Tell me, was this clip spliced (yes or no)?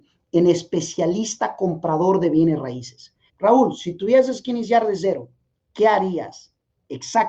yes